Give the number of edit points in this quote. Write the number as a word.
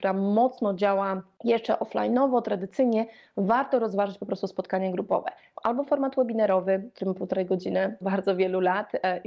two